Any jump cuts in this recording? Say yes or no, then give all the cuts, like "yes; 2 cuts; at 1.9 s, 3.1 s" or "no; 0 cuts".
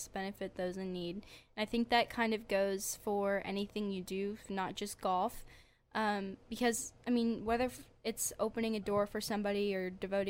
no; 0 cuts